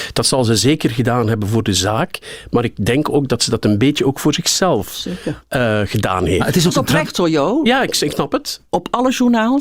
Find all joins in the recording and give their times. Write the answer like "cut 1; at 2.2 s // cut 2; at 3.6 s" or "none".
cut 1; at 8.7 s